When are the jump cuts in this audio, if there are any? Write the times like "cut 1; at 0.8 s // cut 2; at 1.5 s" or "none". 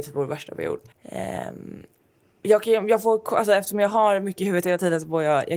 cut 1; at 0.9 s